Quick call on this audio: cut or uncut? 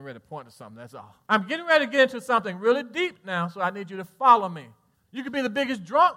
cut